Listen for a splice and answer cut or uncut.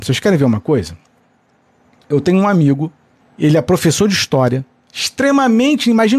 cut